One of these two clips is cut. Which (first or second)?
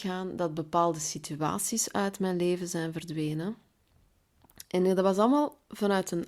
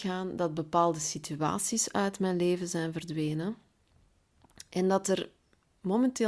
first